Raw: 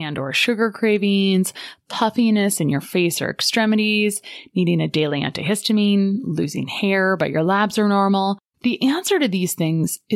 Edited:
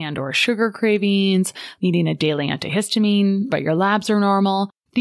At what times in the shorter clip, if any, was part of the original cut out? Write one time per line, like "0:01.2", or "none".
0:01.8
0:03.5